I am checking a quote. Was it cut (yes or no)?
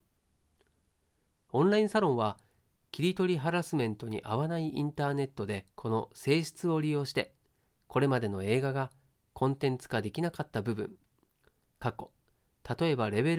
yes